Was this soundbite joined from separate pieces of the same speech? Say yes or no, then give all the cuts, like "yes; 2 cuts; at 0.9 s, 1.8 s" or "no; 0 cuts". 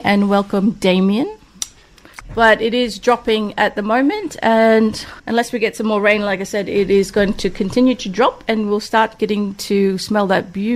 yes; 2 cuts; at 2.2 s, 5.2 s